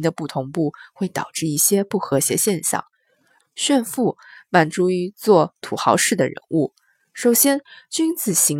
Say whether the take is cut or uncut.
cut